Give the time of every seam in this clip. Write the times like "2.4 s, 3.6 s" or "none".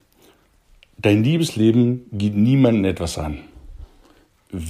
none